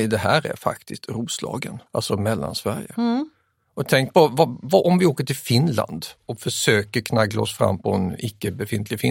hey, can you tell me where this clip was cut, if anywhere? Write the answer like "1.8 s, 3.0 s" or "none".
1.9 s